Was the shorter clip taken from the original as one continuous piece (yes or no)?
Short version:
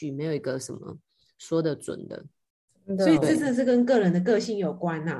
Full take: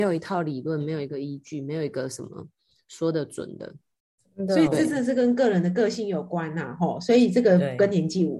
yes